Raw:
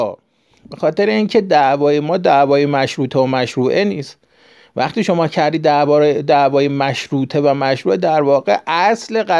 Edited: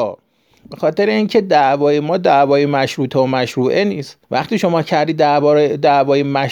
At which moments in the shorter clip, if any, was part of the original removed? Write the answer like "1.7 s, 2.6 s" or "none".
4.2 s

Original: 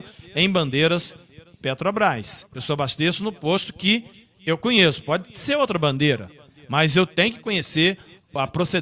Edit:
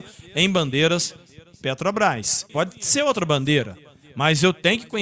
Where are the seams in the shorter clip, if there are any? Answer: 2.5 s

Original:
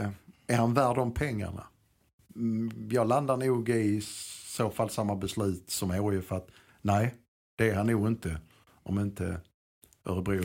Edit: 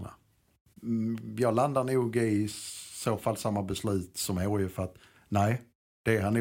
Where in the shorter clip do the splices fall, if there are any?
none

